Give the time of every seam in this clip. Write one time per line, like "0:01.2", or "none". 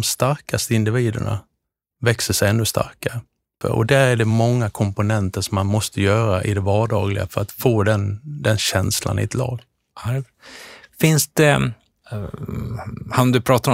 0:03.6